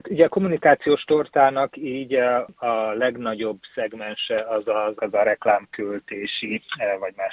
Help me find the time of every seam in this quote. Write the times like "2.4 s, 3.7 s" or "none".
5.0 s